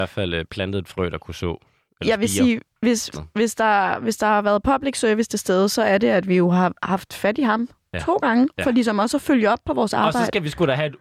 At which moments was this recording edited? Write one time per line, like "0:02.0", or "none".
0:03.1